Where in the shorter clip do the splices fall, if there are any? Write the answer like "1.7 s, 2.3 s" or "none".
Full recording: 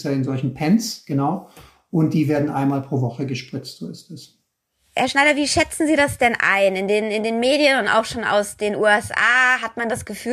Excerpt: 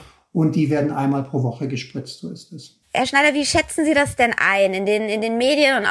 2.8 s